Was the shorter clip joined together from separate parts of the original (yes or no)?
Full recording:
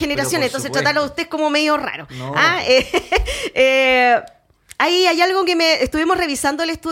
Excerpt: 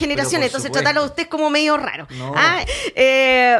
yes